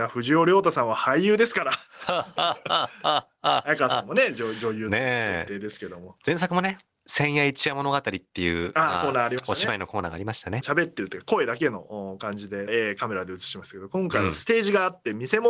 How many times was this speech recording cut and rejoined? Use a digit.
2